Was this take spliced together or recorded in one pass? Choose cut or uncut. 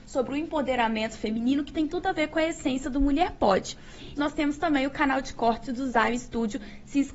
cut